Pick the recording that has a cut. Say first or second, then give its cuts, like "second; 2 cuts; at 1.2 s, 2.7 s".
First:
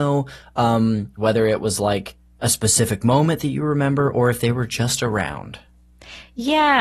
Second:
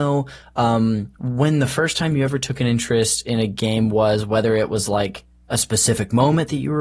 first; 1 cut; at 1.2 s